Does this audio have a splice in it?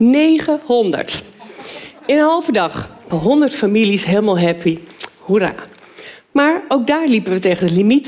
yes; 1 cut; at 3.1 s

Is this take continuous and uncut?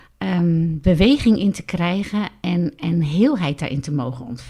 yes; 0 cuts

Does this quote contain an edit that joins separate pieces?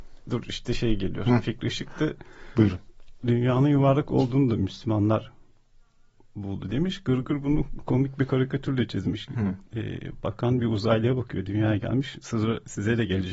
yes; 1 cut; at 9.7 s

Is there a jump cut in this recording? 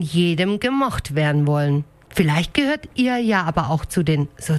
yes; 1 cut; at 2.0 s

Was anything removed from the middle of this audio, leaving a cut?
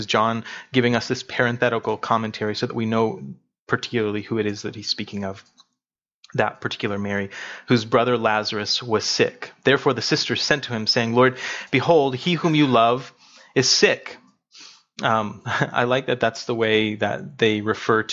no; 0 cuts

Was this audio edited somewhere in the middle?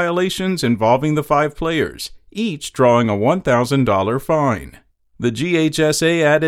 no; 0 cuts

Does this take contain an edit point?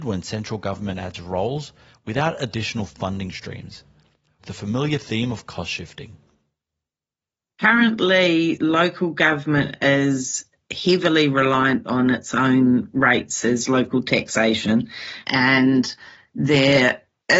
yes; 1 cut; at 4.4 s

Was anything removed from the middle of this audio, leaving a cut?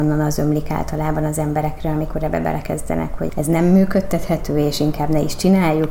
yes; 1 cut; at 3.3 s

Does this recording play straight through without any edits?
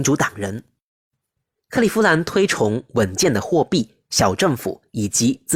yes; 0 cuts

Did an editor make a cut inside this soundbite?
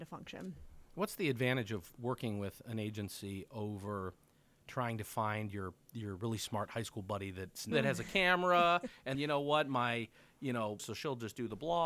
yes; 3 cuts; at 7.7 s, 9.1 s, 10.8 s

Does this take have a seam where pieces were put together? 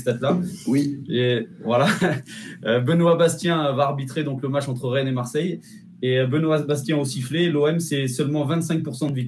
no; 0 cuts

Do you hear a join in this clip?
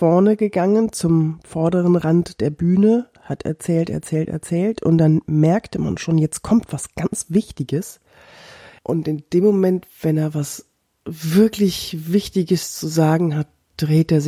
yes; 1 cut; at 8.8 s

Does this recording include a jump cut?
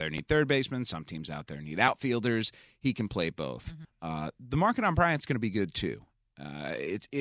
yes; 1 cut; at 3.8 s

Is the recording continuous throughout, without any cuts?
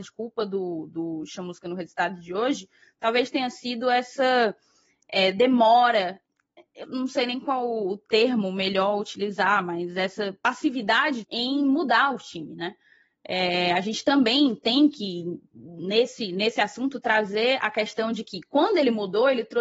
no; 2 cuts; at 6.8 s, 11.2 s

